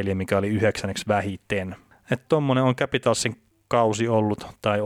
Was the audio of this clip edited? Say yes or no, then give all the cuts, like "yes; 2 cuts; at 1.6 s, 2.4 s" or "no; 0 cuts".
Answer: no; 0 cuts